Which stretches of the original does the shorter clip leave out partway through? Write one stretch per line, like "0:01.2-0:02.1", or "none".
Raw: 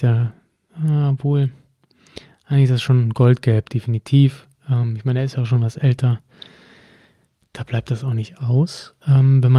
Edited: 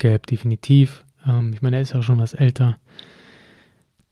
none